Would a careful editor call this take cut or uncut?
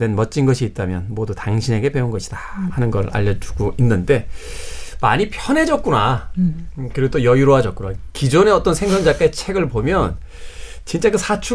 cut